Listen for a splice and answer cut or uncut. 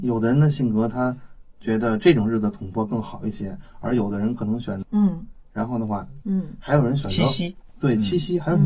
cut